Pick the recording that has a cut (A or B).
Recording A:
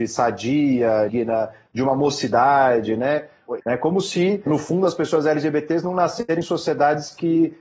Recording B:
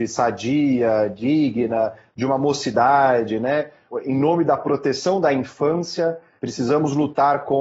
A